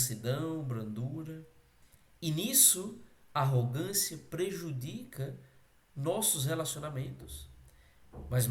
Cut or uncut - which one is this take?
uncut